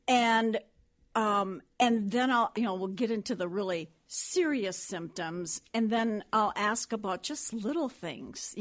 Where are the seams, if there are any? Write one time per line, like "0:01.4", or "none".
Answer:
0:02.5

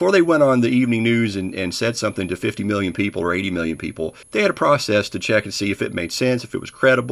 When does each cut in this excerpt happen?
0:04.2

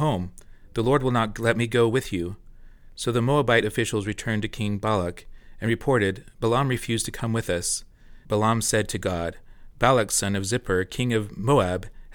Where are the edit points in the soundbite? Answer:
0:08.2

